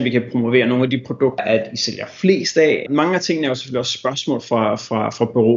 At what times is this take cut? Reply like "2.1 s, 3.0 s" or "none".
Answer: 1.4 s, 2.9 s